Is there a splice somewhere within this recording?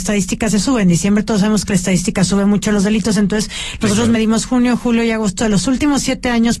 no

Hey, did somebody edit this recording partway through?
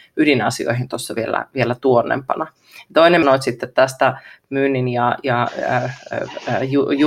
yes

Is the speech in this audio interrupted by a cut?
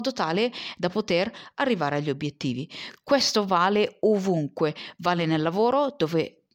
no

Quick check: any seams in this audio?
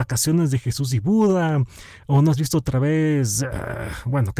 no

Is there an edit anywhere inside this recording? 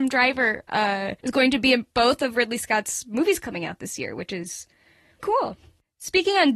yes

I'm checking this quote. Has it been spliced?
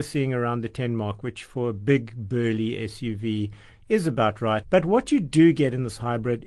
yes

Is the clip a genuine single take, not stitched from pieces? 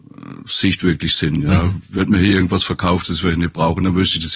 yes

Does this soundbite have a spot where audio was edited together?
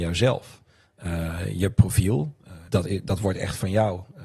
yes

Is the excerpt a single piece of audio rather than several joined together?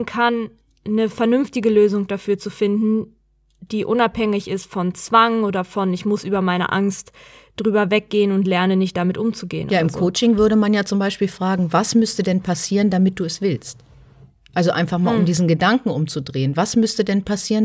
yes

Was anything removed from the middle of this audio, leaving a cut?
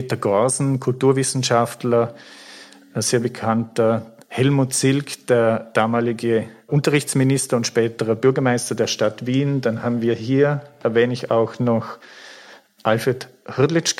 no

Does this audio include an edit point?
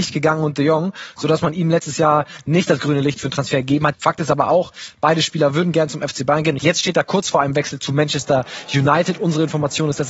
yes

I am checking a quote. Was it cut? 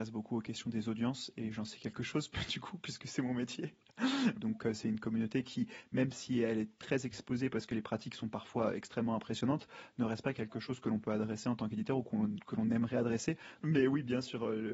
yes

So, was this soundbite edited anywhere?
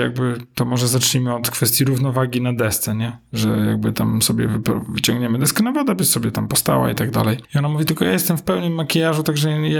no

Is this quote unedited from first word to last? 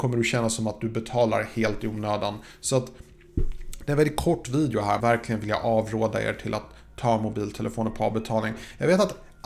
no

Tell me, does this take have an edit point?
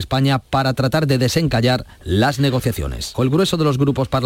yes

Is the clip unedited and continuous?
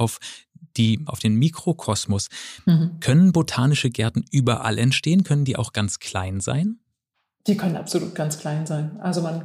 no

